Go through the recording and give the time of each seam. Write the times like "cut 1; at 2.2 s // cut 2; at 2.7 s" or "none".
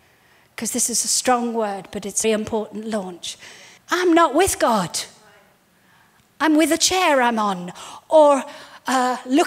cut 1; at 2.2 s // cut 2; at 3.8 s